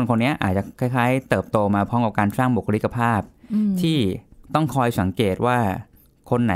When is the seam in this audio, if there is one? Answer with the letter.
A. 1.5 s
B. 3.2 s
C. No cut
C